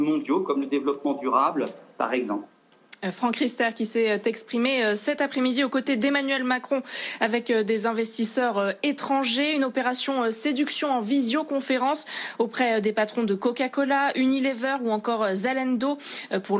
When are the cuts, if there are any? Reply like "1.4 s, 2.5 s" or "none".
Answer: none

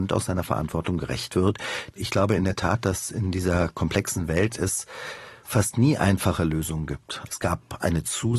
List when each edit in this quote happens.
1.9 s, 7.3 s

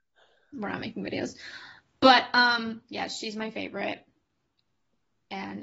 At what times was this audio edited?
none

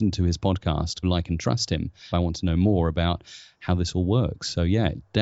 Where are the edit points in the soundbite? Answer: 1.0 s, 2.1 s

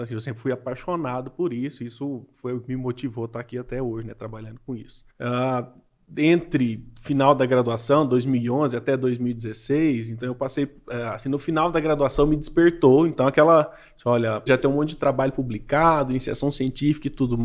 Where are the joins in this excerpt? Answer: 5.1 s, 14.5 s

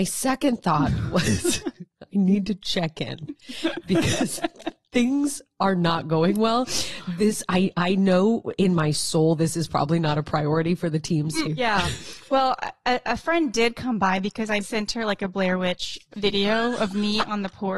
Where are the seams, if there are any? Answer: 11.4 s, 14.6 s

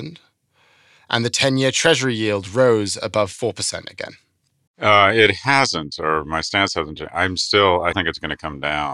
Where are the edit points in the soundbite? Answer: 4.7 s, 7.9 s

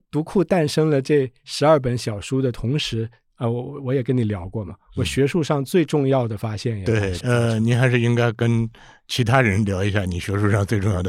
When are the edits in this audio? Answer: 7.2 s

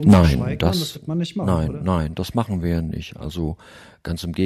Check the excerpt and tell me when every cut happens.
none

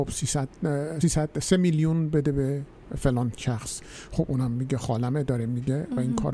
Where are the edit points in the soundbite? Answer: 1.0 s

